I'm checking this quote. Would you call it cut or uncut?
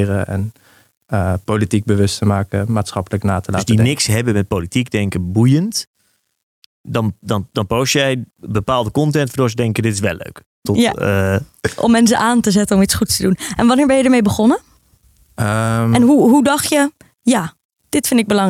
cut